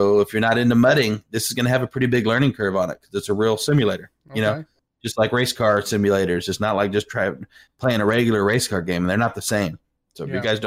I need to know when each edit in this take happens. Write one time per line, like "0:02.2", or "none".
none